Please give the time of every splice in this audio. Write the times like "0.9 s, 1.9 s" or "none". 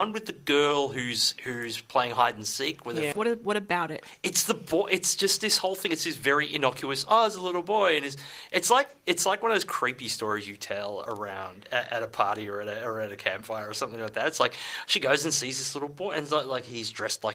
3.1 s